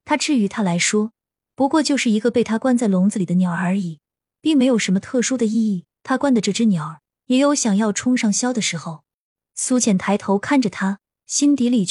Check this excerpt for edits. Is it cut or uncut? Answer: cut